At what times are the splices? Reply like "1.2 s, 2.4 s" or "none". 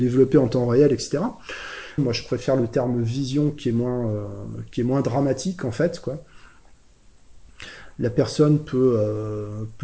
2.0 s

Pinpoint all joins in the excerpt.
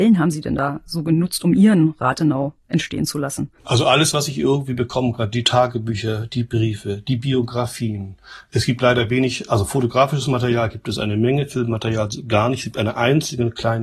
3.6 s

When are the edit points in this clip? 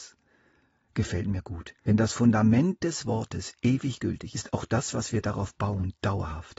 1.8 s, 4.3 s

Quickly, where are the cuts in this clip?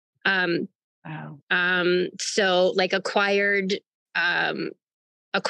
1.4 s

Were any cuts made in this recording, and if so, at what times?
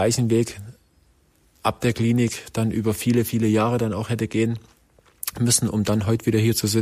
none

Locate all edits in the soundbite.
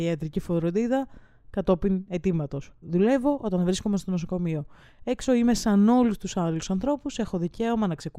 none

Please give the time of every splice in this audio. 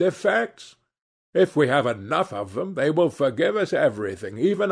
none

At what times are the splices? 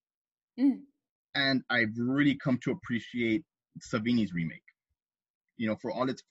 none

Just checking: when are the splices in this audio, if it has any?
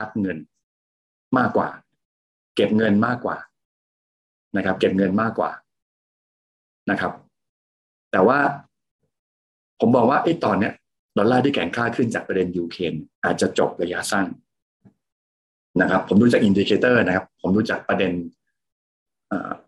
13.1 s

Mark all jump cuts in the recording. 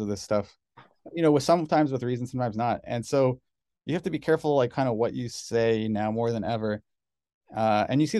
none

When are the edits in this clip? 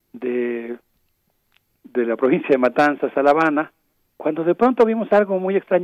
4.1 s

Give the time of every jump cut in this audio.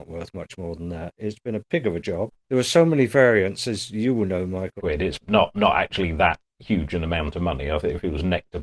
1.2 s, 4.8 s

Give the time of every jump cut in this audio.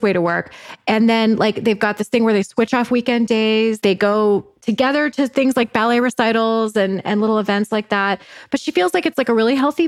none

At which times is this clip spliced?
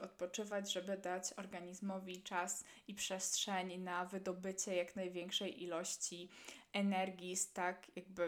none

